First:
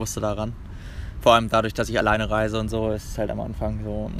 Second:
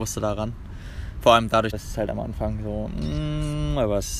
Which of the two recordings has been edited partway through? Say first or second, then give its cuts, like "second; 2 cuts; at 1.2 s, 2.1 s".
second; 1 cut; at 1.7 s